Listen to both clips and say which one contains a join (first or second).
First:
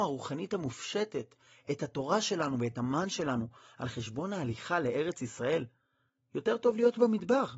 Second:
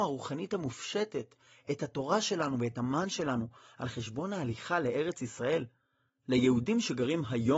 second